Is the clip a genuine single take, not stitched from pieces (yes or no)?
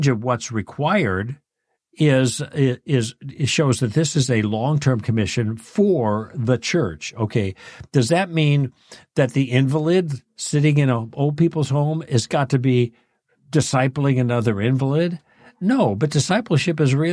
yes